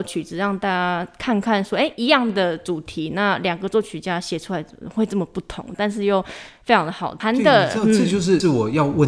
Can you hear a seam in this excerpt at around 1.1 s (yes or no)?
no